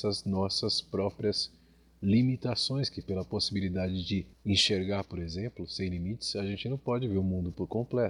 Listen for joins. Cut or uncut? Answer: uncut